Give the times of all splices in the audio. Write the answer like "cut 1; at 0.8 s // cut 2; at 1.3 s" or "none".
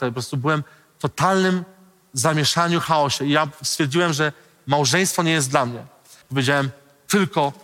cut 1; at 6.2 s

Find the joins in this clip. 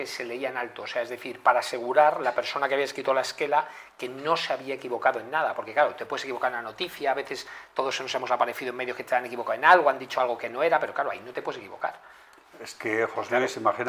none

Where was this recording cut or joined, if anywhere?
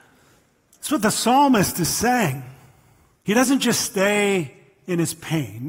cut 1; at 3.2 s

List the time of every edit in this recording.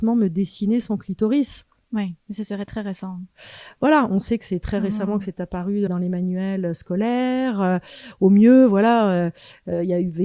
cut 1; at 5.9 s

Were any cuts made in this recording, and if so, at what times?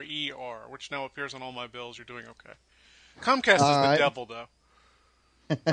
none

